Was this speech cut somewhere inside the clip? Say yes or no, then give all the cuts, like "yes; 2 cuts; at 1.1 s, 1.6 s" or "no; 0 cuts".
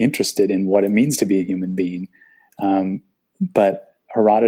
no; 0 cuts